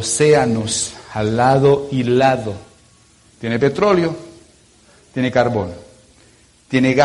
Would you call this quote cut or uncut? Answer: cut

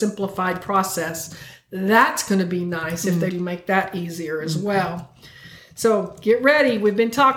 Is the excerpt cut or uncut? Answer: cut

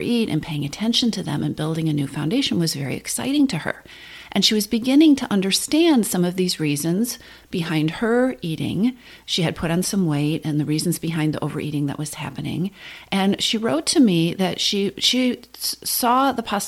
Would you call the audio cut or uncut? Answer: uncut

